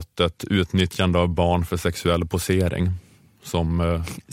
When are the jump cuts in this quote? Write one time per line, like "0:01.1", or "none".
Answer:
none